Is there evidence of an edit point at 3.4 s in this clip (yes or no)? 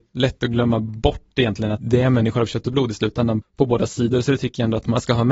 yes